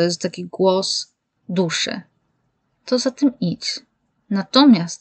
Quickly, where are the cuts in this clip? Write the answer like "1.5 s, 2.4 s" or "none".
none